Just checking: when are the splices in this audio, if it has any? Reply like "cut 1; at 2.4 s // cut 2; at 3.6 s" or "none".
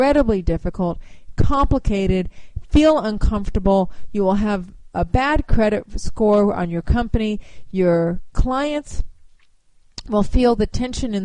cut 1; at 7.7 s